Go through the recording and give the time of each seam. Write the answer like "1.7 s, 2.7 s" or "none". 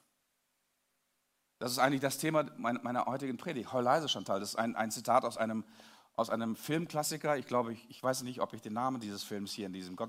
none